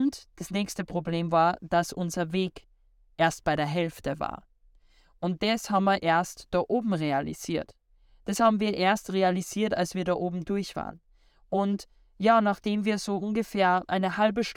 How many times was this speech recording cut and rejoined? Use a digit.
0